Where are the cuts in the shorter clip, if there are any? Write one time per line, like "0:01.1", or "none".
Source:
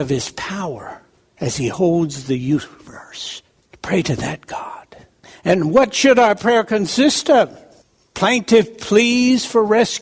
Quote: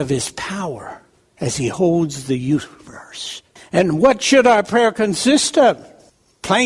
0:03.6